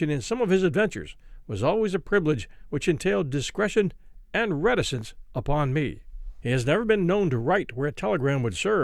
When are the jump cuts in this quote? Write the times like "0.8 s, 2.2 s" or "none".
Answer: 6.4 s